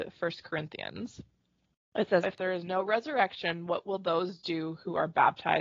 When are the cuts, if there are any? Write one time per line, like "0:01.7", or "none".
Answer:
0:02.2